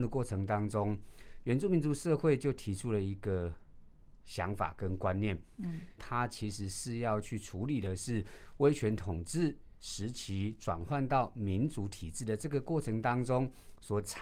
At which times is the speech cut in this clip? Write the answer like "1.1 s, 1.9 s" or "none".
6.0 s